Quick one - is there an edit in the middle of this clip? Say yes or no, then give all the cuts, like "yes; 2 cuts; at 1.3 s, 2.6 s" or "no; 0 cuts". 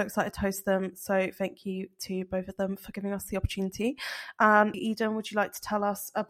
yes; 1 cut; at 4.7 s